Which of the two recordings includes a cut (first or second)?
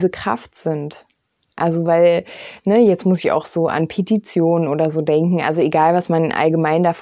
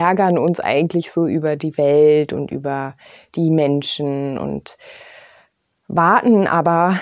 first